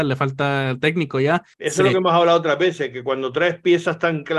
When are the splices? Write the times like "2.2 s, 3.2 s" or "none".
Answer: 1.5 s